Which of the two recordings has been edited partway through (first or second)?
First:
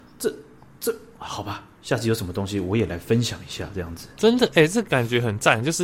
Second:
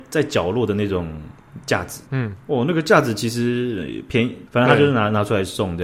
second